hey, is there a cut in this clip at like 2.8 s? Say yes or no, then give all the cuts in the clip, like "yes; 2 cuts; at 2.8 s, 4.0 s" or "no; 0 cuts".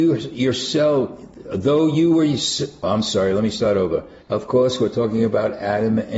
no; 1 cut; at 4.2 s